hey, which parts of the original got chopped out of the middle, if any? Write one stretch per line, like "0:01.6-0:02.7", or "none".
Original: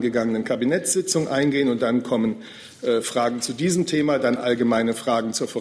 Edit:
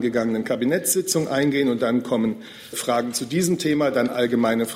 0:02.7-0:03.0